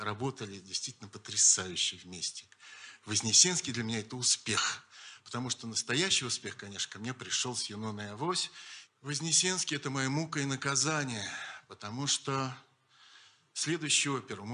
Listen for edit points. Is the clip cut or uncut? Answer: uncut